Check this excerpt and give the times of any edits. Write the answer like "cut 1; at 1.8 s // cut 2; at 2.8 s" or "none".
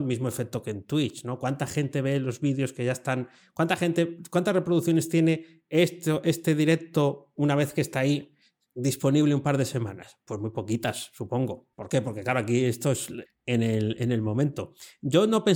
cut 1; at 11.7 s // cut 2; at 13.2 s